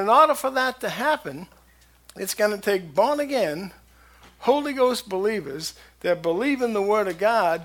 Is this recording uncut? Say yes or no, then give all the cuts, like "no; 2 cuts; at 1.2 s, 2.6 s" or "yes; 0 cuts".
yes; 0 cuts